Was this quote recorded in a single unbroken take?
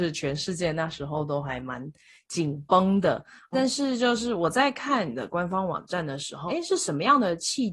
no; 2 cuts; at 3.5 s, 6.5 s

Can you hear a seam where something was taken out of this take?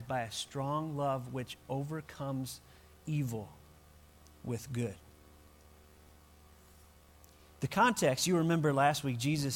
no; 0 cuts

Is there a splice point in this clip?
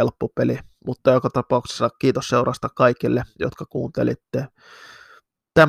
no; 0 cuts

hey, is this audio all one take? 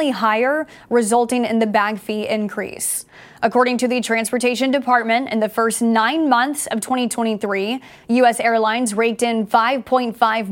yes; 0 cuts

